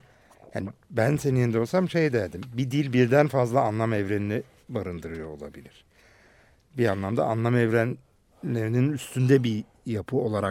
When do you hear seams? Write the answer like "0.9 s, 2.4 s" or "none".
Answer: none

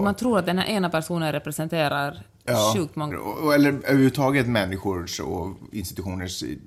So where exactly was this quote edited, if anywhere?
3.1 s

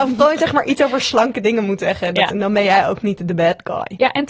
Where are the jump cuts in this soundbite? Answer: 2.3 s

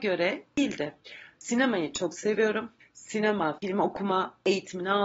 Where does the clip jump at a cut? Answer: 3.6 s

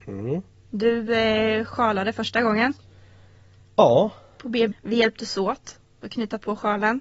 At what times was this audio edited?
4.7 s

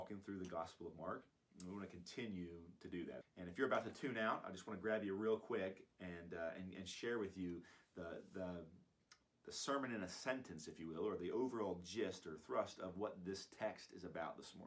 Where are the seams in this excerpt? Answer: 3.2 s

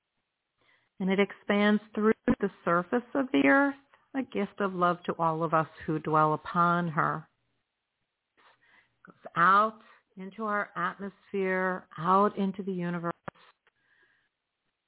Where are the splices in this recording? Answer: 8.4 s

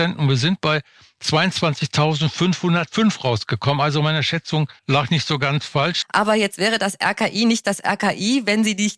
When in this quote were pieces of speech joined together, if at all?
4.8 s, 6.0 s

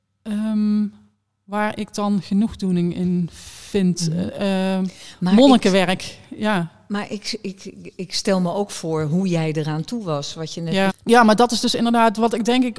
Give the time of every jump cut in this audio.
10.9 s

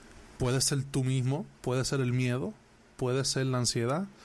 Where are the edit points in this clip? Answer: 1.6 s

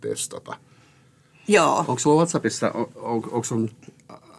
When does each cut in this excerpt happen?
none

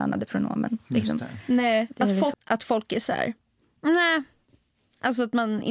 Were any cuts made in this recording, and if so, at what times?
2.3 s

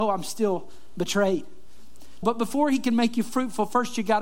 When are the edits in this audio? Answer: 2.2 s

